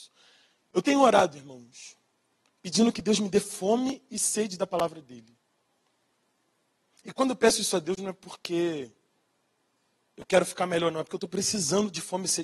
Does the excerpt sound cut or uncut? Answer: uncut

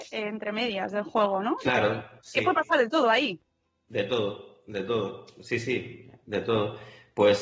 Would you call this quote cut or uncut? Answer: uncut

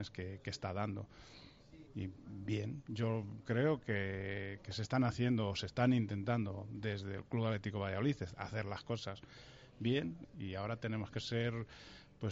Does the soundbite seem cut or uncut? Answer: cut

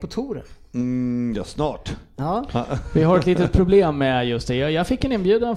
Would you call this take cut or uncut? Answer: uncut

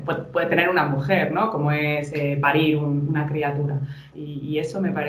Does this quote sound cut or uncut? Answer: cut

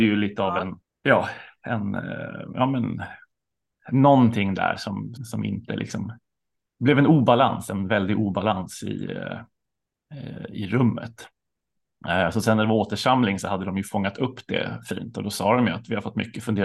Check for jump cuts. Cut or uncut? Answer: cut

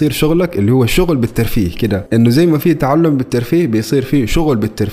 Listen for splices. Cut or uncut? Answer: uncut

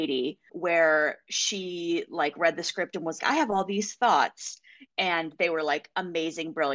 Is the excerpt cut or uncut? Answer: cut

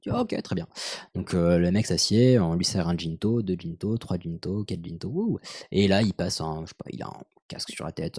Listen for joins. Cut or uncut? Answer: uncut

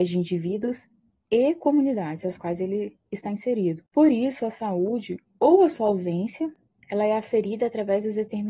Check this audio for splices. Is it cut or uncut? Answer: uncut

